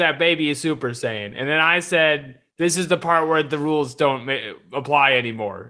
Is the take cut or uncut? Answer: uncut